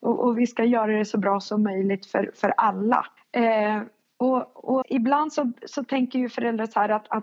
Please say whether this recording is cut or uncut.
cut